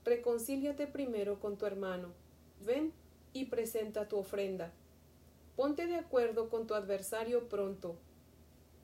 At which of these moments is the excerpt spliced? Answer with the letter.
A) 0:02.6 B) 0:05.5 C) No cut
A